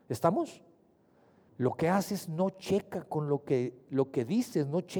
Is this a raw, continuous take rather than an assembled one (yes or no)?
no